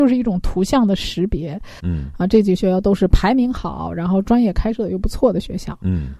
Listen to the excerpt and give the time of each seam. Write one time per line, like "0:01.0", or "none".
0:01.8